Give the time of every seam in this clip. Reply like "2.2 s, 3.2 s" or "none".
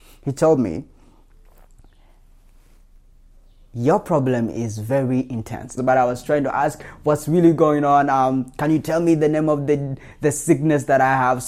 5.8 s

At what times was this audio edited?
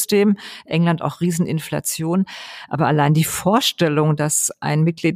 2.7 s

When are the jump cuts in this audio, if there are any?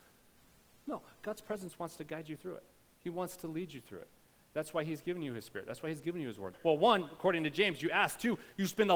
6.5 s

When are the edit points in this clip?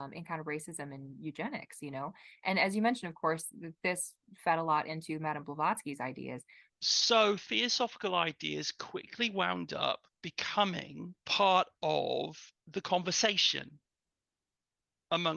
6.7 s, 11.2 s

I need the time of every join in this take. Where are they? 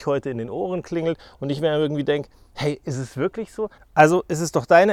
3.8 s

